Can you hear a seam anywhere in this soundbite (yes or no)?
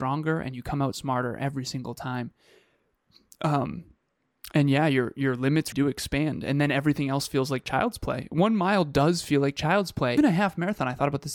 yes